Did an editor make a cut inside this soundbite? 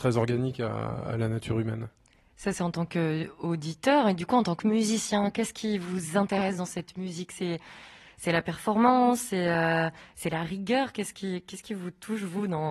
no; 0 cuts

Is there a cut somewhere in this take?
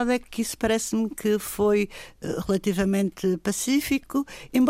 no; 0 cuts

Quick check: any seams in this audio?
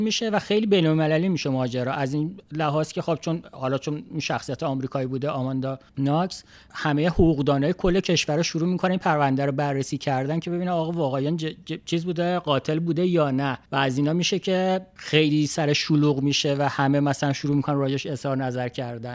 yes; 2 cuts; at 5.9 s, 13.6 s

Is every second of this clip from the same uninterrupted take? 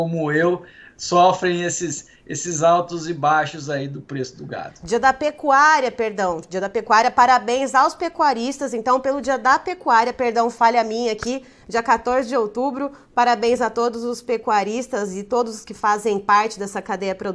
yes; 0 cuts

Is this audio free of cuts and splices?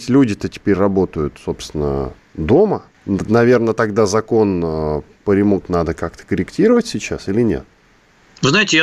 no; 2 cuts; at 2.9 s, 5.6 s

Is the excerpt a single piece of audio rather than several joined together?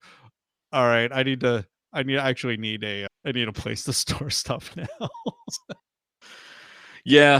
no; 2 cuts; at 3.1 s, 5.8 s

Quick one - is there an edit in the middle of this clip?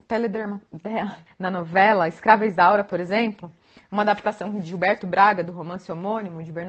yes; 1 cut; at 1.3 s

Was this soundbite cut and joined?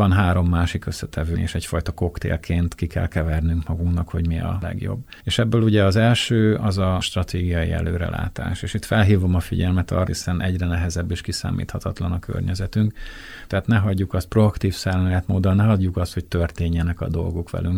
yes; 3 cuts; at 1.3 s, 10.1 s, 13.5 s

